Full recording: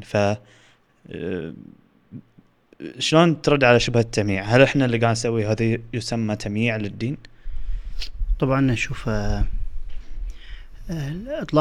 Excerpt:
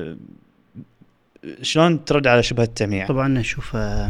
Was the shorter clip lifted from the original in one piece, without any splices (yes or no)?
no